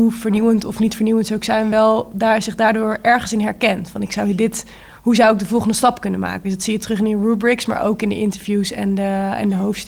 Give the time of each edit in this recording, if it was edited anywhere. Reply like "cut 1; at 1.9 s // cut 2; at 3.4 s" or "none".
none